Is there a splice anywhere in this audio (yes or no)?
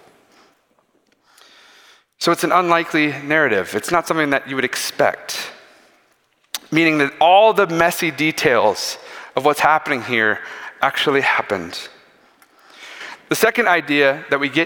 no